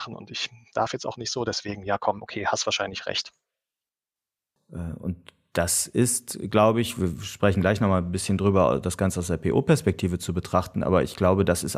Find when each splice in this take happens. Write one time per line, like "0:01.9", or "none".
0:04.6